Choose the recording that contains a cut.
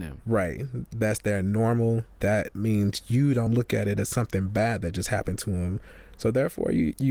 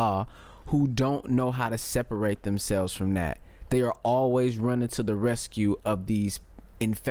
first; 2 cuts; at 2.1 s, 3.5 s

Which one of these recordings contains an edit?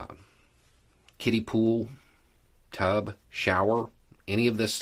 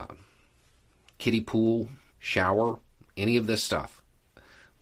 second; 1 cut; at 2.1 s

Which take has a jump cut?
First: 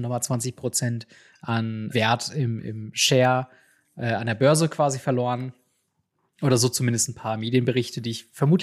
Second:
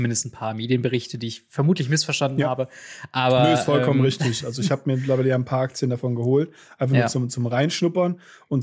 first; 1 cut; at 1.9 s

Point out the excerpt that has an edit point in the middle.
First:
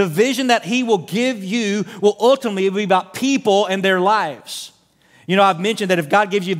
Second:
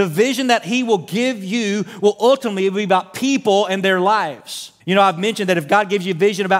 second; 1 cut; at 4.8 s

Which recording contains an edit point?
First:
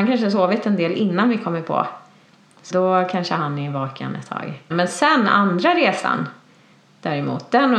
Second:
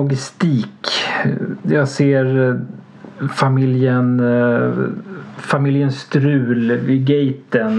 first; 2 cuts; at 2.7 s, 4.7 s

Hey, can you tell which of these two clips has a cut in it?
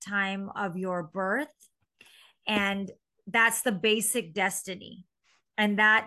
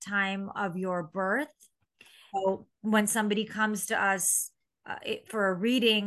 second; 2 cuts; at 2.3 s, 4.8 s

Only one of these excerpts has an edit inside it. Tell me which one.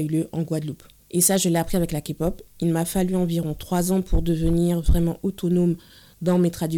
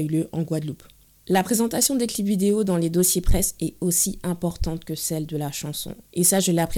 first; 1 cut; at 1.0 s

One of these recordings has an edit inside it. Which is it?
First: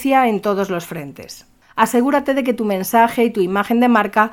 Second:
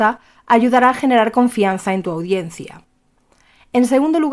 first; 1 cut; at 1.6 s

